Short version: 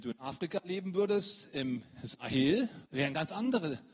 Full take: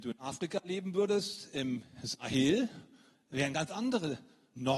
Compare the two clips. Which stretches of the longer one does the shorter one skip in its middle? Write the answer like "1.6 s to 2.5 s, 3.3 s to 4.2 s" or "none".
2.9 s to 3.3 s